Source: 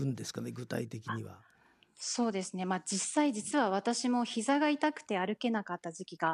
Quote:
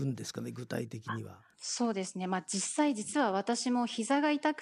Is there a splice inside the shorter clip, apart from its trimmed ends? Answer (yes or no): yes